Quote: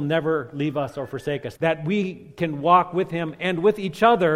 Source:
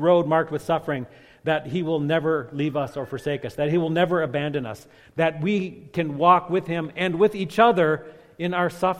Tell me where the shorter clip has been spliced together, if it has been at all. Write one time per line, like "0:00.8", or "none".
0:01.6